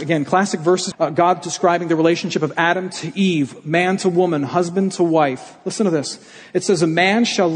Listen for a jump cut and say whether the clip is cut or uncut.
cut